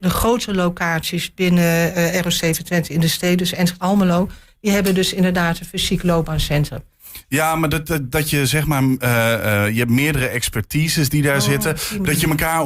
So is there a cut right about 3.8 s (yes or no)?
yes